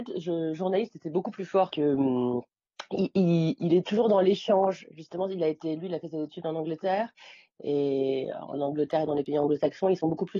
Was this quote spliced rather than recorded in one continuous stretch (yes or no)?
yes